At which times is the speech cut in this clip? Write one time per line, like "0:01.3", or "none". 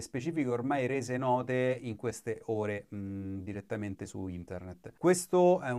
none